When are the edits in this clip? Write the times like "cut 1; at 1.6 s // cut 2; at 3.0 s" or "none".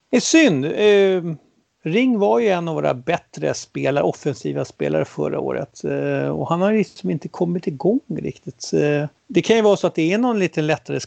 cut 1; at 9.2 s